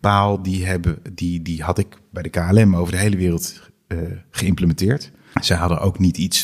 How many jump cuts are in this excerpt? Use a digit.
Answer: 1